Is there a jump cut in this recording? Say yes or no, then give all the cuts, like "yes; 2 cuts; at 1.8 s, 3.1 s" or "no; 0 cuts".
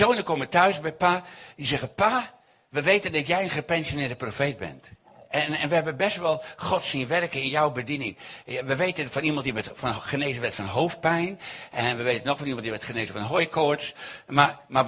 no; 0 cuts